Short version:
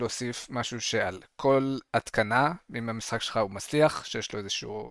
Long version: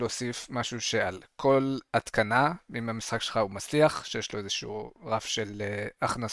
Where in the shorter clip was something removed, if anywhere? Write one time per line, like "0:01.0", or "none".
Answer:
none